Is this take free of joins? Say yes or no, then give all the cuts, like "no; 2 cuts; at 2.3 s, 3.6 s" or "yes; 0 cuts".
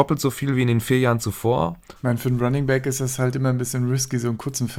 no; 1 cut; at 2.0 s